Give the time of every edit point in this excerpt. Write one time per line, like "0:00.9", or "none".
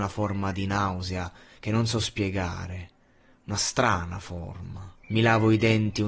0:05.0